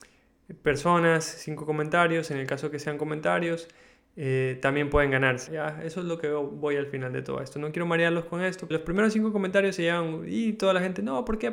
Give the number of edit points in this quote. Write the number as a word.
two